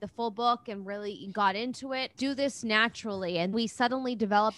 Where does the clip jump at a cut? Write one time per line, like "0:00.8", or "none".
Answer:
0:02.2
0:03.5